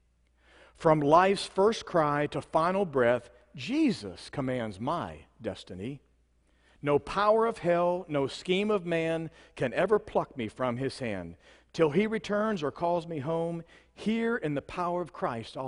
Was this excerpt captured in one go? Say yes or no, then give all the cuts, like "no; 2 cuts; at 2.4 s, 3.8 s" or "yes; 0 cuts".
yes; 0 cuts